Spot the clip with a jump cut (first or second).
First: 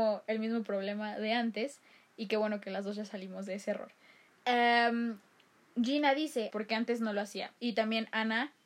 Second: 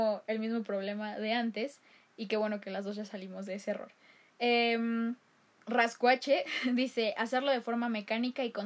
first